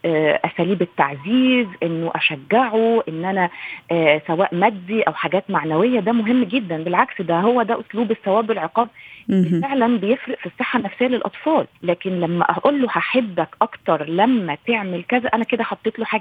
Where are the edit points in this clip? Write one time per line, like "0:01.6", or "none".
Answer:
0:11.7